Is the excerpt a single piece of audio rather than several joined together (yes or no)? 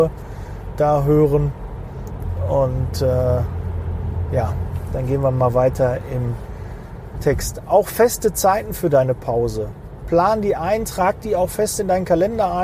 yes